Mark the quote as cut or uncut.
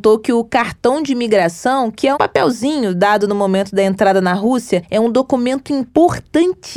cut